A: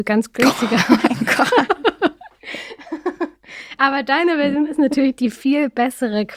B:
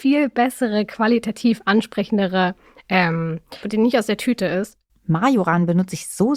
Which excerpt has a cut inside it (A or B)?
B